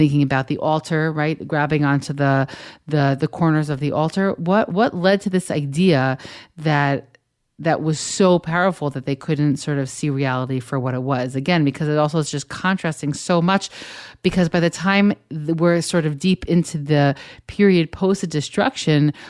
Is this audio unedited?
yes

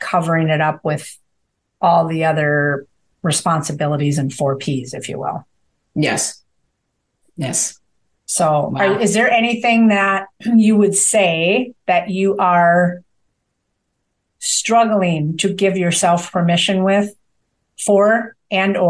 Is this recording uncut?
yes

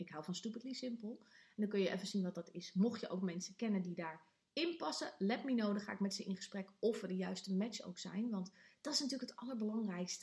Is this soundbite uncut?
yes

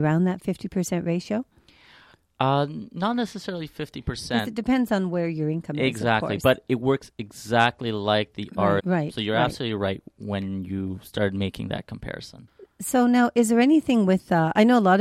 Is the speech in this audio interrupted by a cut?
yes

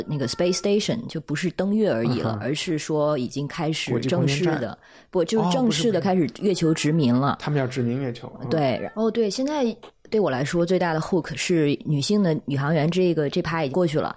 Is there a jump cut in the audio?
yes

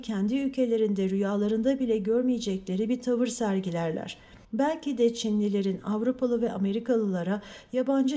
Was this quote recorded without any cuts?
no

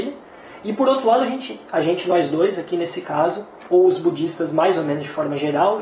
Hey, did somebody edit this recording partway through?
no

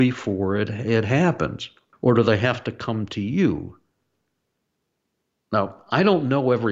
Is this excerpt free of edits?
no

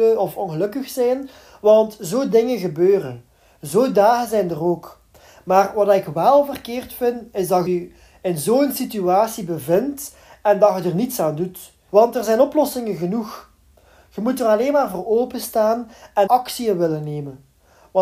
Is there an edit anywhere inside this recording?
yes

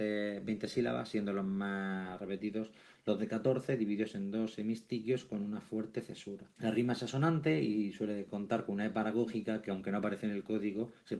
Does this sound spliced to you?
yes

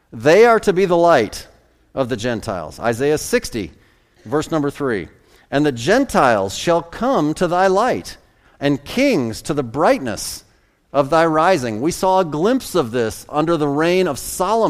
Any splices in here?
no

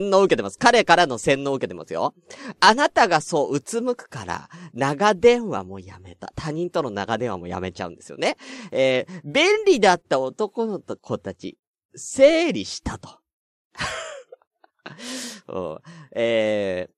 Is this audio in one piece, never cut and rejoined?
yes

